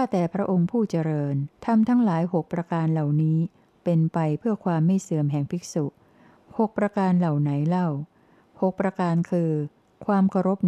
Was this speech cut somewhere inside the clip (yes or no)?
yes